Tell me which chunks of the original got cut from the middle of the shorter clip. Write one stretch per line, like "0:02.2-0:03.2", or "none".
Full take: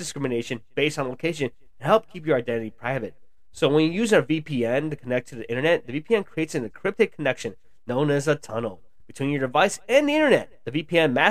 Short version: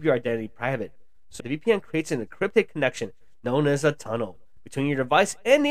0:03.6-0:05.8